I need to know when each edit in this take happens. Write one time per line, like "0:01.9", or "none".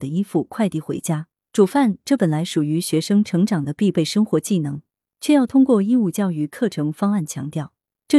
0:01.4